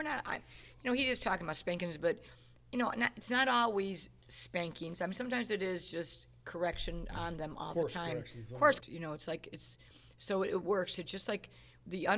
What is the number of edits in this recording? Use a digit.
1